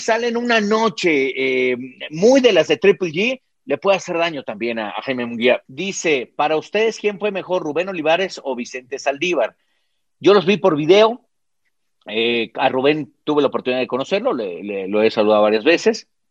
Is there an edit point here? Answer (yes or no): yes